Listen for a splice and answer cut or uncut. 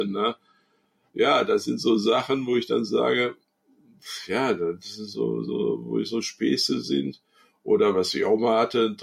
uncut